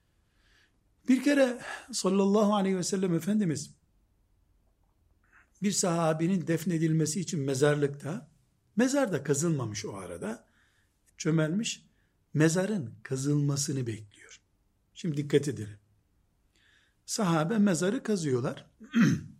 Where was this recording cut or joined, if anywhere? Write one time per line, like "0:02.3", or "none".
0:11.1